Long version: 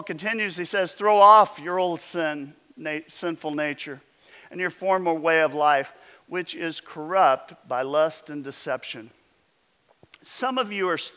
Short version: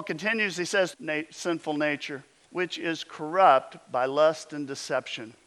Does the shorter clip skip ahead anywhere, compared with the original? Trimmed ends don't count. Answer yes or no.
yes